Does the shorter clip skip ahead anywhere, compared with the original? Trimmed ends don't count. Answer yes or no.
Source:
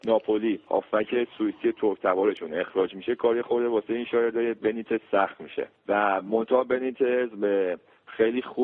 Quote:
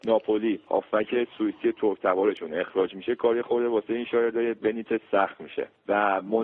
no